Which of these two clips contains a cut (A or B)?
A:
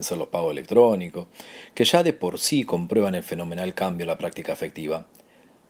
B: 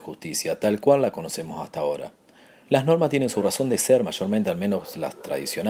B